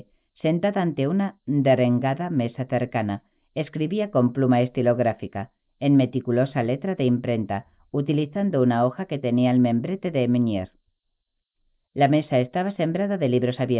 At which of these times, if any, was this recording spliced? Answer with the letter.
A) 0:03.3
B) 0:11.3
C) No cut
C